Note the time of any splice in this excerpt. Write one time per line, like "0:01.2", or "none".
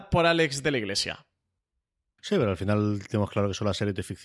none